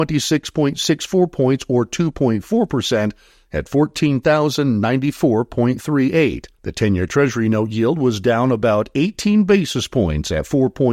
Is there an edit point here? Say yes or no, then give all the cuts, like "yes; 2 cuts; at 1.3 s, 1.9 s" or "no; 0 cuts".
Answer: yes; 1 cut; at 6.5 s